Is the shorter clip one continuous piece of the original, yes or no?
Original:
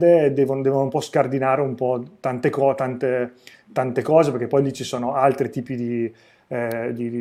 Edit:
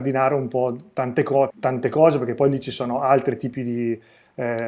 no